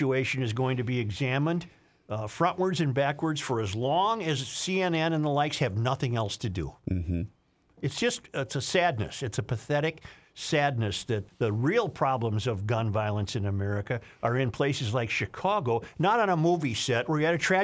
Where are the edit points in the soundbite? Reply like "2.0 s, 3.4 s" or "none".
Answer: 11.3 s